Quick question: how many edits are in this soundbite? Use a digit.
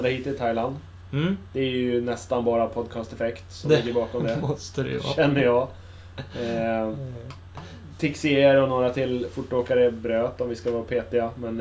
0